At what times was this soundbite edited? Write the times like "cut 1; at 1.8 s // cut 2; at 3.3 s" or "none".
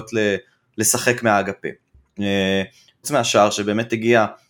cut 1; at 3.0 s